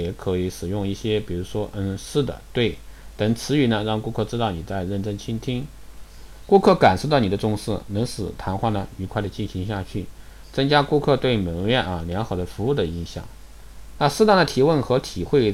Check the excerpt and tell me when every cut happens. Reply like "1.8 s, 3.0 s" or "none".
none